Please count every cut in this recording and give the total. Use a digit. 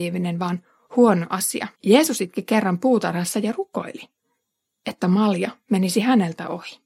1